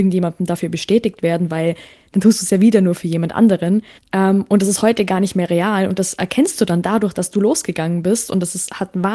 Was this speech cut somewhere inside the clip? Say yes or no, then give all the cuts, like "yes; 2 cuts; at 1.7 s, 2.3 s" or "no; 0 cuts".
yes; 1 cut; at 4.0 s